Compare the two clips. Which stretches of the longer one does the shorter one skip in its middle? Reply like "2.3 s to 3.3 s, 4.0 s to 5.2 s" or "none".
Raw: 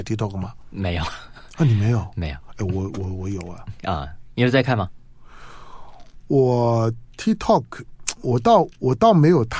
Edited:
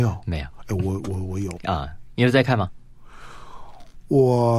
3.5 s to 3.8 s